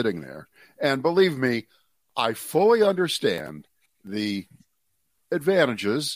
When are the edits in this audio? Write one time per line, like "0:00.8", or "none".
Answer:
none